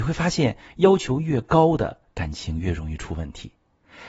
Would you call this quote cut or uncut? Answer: uncut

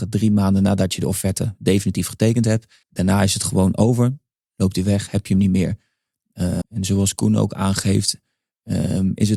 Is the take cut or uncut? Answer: cut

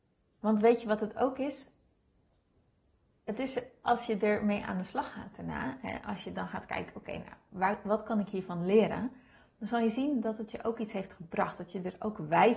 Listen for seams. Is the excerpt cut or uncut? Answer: uncut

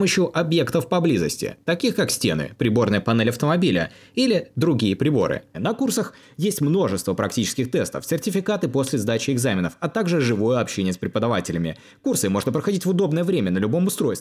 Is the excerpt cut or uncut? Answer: cut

